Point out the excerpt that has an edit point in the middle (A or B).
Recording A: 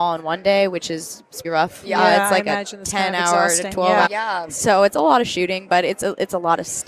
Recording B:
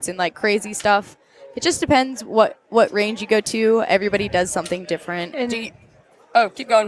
A